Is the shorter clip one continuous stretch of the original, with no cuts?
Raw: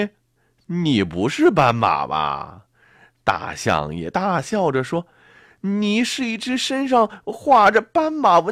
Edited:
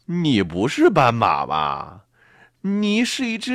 no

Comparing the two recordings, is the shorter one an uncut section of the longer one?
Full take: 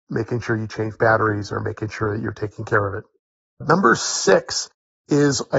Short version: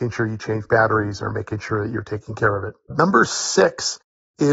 no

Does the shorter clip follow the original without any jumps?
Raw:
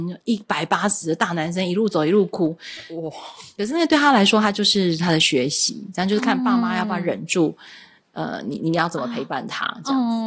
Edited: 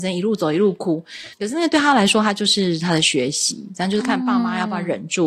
no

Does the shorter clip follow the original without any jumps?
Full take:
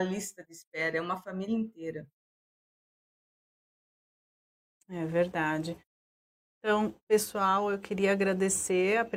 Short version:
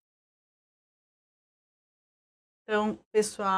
no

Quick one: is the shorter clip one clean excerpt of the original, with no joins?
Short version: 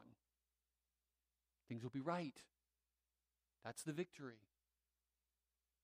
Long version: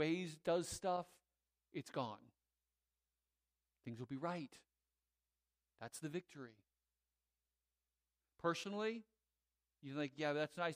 yes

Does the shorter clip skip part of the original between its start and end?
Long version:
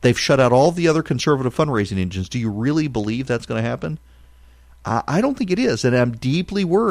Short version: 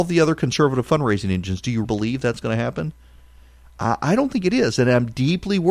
yes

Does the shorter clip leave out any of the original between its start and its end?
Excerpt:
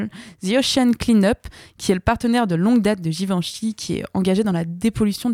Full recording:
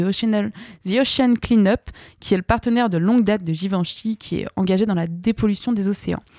no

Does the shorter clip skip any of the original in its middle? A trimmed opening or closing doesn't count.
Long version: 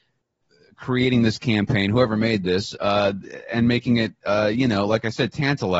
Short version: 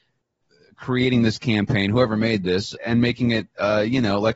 yes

